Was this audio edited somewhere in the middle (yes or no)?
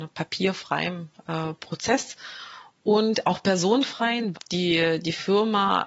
yes